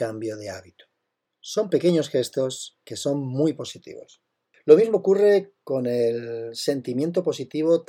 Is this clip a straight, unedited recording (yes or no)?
yes